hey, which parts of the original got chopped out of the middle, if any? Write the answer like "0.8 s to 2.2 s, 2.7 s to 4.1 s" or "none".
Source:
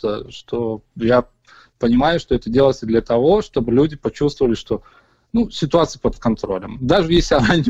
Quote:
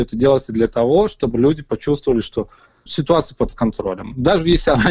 5.2 s to 5.5 s